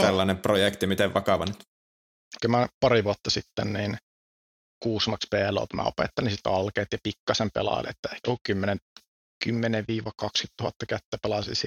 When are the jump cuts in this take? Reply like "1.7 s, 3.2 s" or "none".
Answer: 2.4 s